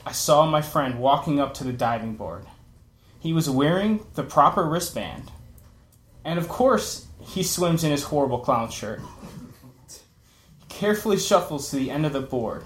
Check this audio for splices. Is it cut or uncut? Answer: uncut